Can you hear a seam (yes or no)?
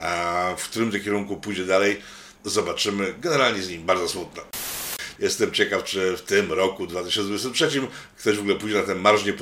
yes